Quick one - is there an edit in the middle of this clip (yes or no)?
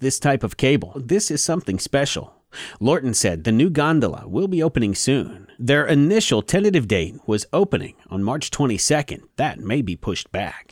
yes